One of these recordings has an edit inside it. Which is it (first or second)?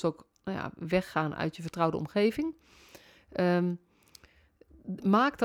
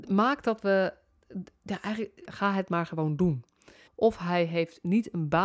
second